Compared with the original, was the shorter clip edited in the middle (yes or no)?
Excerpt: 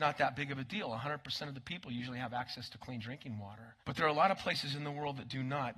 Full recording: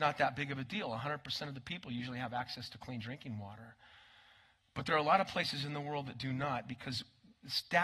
yes